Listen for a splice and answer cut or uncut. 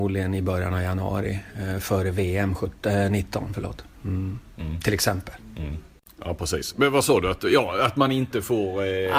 uncut